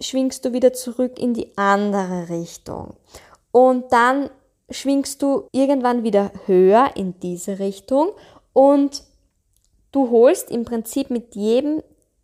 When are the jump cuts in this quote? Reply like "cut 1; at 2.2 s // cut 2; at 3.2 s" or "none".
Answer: cut 1; at 5.5 s

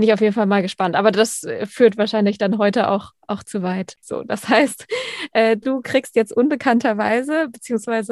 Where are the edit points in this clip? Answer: cut 1; at 4.0 s

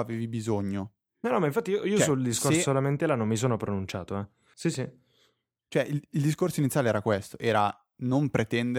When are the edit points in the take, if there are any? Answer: cut 1; at 4.5 s

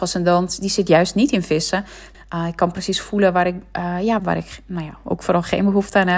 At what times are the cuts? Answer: cut 1; at 2.1 s // cut 2; at 4.2 s

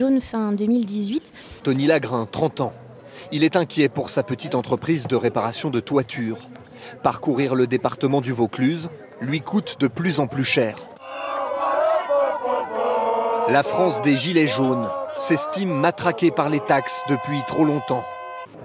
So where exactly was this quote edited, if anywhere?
cut 1; at 1.6 s

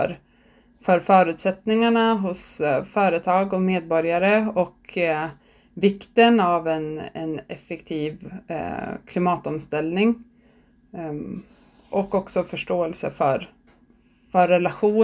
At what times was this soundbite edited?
none

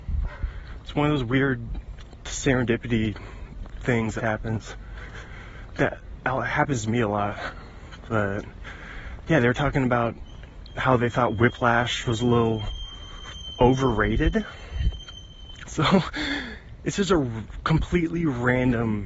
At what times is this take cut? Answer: cut 1; at 4.2 s // cut 2; at 15.6 s

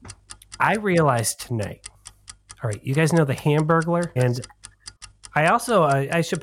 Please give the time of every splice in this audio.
cut 1; at 4.2 s

